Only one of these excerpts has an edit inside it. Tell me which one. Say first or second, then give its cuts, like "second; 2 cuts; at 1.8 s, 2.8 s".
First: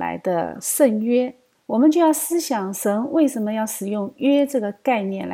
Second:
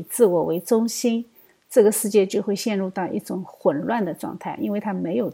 first; 1 cut; at 1.5 s